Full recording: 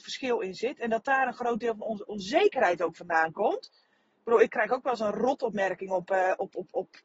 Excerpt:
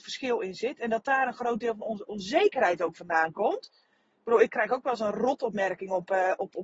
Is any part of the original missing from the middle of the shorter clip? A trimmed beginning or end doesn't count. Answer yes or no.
no